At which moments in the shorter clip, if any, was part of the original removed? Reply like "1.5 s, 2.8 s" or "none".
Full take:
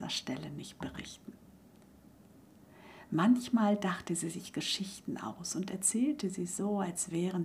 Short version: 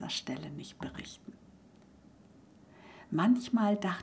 none